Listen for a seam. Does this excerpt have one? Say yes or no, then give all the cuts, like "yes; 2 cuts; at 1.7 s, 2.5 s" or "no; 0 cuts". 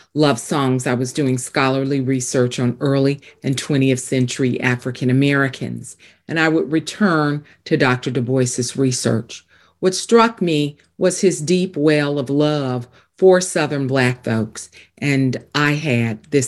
no; 0 cuts